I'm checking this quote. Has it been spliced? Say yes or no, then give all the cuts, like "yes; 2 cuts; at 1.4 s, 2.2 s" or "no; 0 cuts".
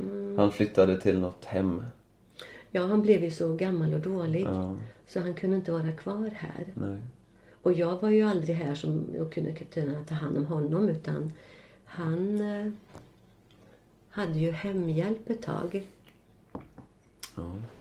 no; 0 cuts